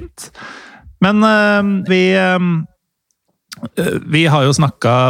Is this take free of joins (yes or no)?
no